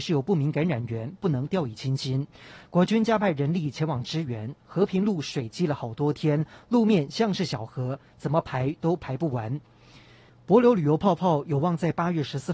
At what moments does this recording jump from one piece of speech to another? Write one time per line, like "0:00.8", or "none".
0:02.6
0:10.3